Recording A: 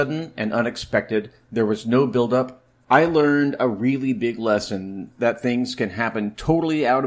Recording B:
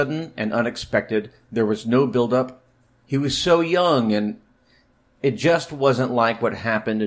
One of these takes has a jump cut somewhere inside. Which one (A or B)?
A